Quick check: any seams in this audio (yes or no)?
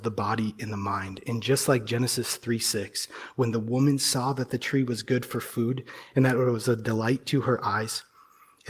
no